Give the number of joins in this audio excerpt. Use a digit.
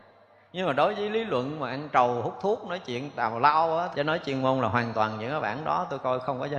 1